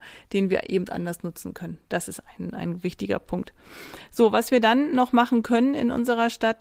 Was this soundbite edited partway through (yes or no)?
no